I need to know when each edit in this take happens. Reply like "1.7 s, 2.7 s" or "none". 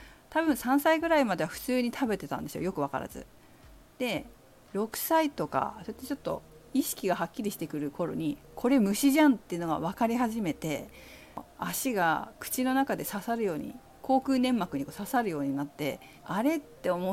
16.2 s